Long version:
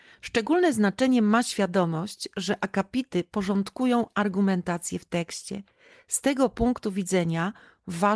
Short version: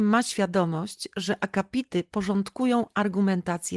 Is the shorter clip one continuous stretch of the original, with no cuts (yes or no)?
yes